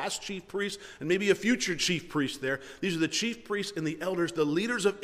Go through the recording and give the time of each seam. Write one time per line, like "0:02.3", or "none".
none